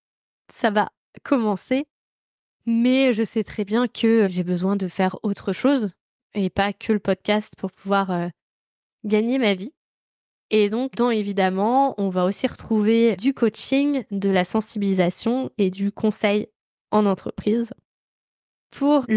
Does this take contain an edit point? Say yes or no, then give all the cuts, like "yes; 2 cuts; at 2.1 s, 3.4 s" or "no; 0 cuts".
no; 0 cuts